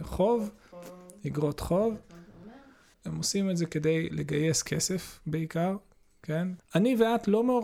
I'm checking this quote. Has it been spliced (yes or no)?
yes